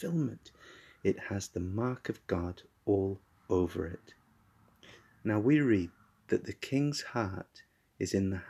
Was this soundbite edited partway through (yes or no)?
no